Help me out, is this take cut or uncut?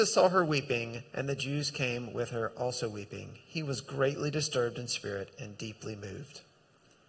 uncut